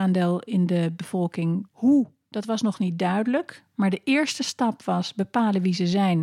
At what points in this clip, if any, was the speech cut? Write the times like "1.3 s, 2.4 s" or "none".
1.7 s